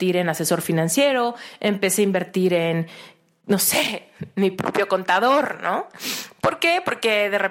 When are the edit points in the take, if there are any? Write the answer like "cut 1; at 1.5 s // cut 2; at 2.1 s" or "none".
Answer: none